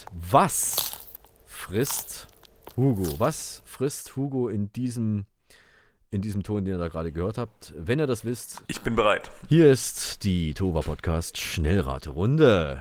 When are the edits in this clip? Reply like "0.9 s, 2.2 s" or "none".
8.6 s